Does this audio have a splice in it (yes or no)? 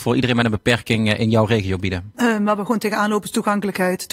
yes